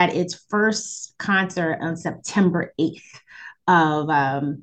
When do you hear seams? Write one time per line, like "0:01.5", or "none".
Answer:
none